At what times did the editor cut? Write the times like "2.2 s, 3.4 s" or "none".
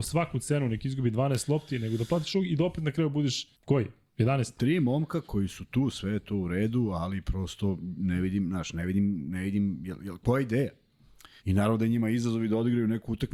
3.5 s, 11.4 s

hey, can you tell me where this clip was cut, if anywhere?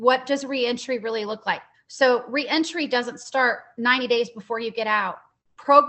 1.7 s

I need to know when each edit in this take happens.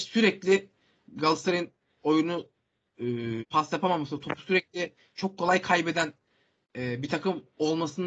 3.4 s

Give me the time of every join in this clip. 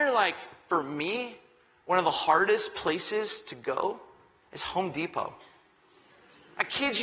none

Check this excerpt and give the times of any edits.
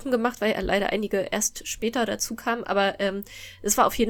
none

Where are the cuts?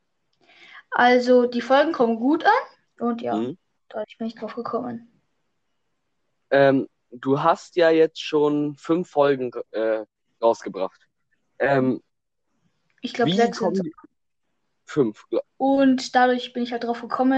2.8 s, 15.4 s

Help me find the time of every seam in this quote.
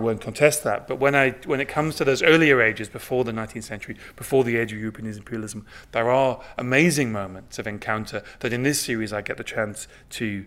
none

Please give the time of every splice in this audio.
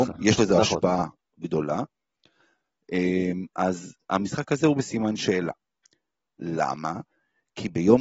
none

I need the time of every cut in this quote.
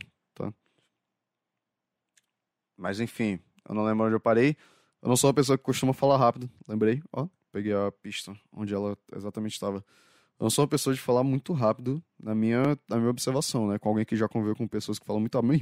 none

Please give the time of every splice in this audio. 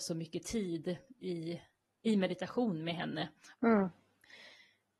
3.5 s

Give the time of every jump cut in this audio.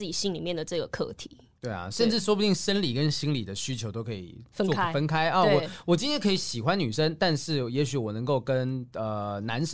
none

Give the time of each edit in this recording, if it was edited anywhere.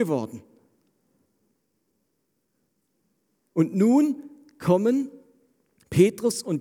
none

